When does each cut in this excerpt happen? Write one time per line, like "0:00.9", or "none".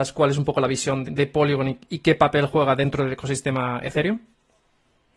0:01.1